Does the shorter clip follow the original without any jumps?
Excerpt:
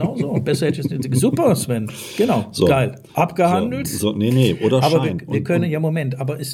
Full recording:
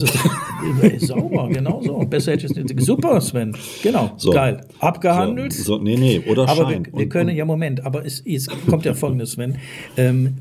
yes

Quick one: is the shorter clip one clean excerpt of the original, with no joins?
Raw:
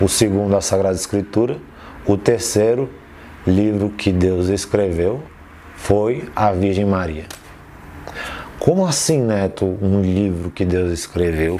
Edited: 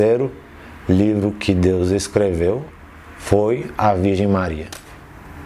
yes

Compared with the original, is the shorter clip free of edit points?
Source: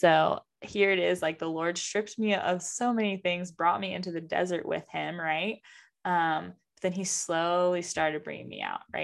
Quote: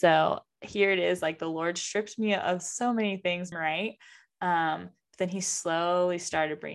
no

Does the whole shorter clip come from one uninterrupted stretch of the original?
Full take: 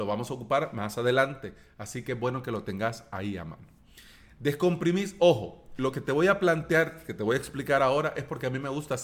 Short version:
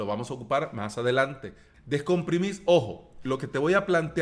no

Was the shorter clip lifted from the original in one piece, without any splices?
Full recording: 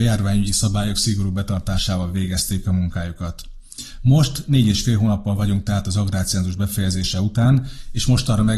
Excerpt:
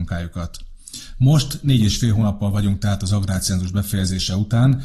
yes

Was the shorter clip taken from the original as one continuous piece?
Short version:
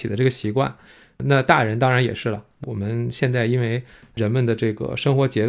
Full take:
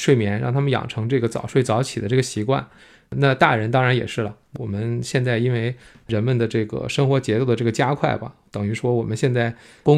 yes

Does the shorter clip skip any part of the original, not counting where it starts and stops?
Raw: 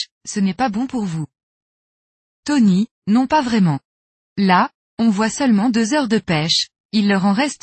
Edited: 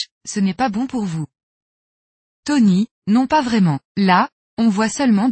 yes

